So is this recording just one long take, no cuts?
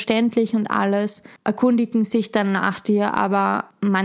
no; 1 cut; at 1.4 s

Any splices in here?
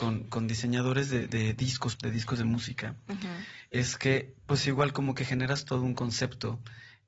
yes; 1 cut; at 2.0 s

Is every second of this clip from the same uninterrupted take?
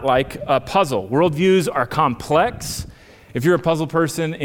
no; 1 cut; at 3.3 s

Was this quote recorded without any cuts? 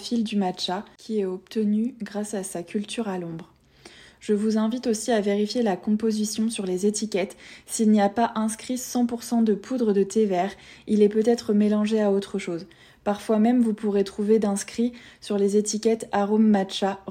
yes; 0 cuts

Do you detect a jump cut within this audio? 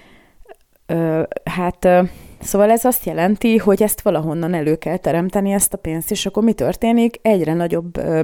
no; 0 cuts

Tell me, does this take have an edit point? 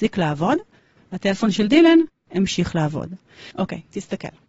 yes; 1 cut; at 3.5 s

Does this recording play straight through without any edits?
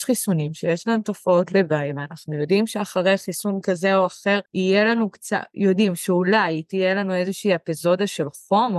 no; 1 cut; at 4.4 s

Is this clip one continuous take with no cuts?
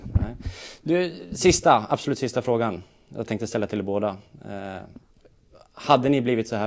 yes; 0 cuts

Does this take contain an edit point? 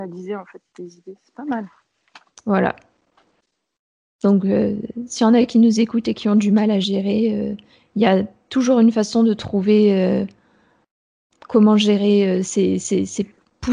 no; 0 cuts

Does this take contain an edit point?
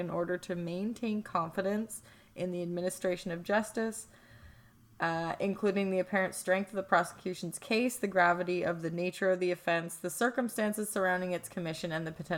no; 0 cuts

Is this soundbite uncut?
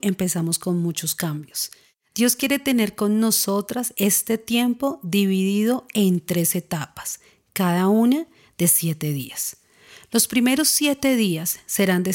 yes; 0 cuts

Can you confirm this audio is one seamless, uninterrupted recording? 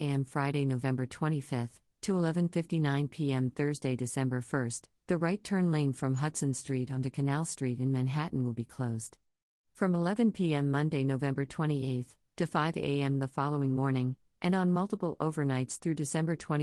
yes; 0 cuts

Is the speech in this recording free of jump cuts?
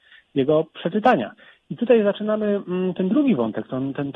yes; 0 cuts

